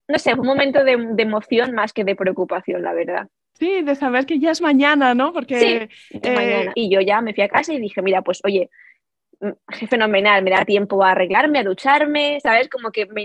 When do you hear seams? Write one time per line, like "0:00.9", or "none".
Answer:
0:06.7